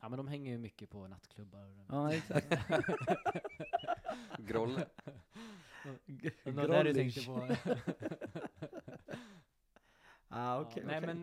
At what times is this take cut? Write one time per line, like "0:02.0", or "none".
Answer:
none